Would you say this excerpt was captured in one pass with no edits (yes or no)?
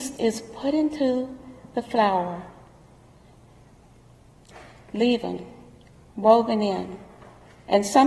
yes